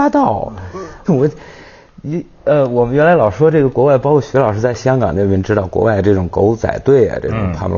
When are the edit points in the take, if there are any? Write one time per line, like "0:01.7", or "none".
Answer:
0:01.0